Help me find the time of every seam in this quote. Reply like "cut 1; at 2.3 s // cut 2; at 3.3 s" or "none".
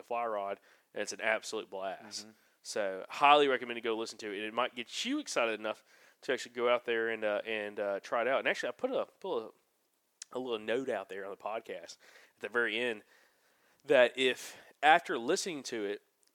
none